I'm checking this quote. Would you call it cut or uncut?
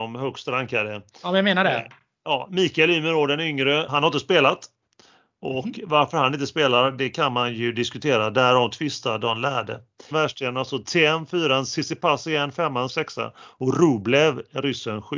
cut